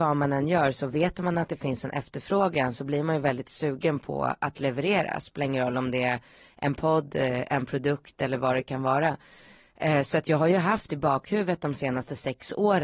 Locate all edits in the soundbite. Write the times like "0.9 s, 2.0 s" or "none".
none